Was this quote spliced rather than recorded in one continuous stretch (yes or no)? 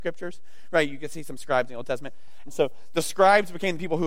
yes